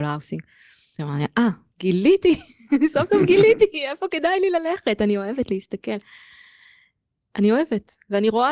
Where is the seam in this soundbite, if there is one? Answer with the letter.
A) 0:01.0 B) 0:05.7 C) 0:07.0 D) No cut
A